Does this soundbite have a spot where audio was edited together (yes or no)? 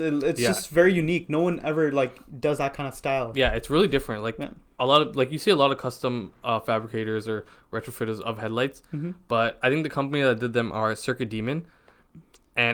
no